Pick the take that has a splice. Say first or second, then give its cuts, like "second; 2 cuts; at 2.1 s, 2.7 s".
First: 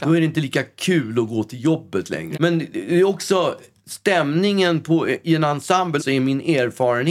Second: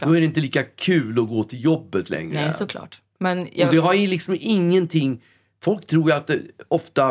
first; 2 cuts; at 2.3 s, 6.0 s